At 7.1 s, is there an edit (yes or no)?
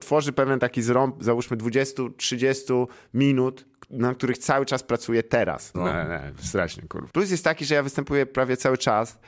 yes